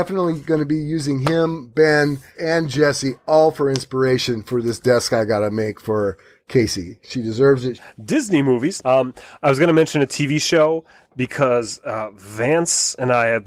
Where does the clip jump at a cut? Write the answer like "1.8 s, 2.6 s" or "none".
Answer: 2.3 s, 7.8 s, 8.8 s